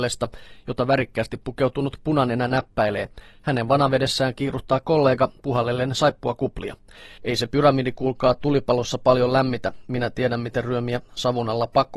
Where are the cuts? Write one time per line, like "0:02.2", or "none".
0:05.4
0:07.2